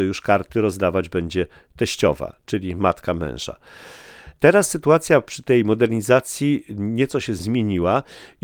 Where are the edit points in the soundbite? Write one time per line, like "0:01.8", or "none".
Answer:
none